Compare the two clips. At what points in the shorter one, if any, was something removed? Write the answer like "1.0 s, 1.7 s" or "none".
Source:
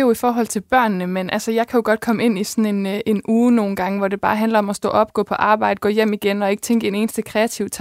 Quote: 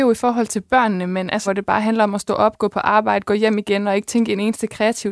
1.5 s